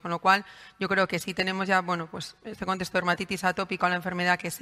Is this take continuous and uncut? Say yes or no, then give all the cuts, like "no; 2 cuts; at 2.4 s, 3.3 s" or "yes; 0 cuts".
yes; 0 cuts